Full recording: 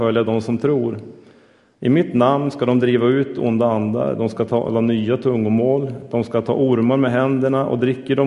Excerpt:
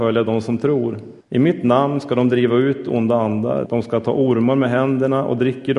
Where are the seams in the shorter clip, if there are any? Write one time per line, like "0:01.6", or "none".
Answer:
0:01.2
0:03.7